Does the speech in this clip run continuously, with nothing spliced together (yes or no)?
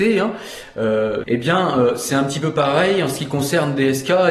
no